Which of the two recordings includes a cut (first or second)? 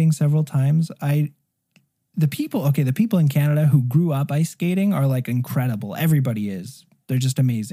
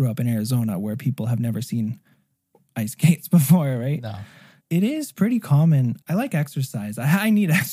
second